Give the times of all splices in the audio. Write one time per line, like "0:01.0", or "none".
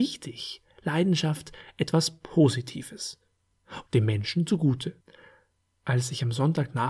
0:03.9
0:05.8